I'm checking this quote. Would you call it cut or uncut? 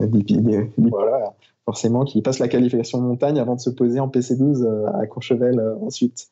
cut